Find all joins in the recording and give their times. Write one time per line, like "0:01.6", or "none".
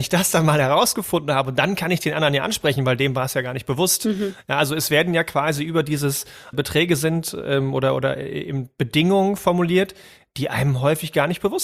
0:06.5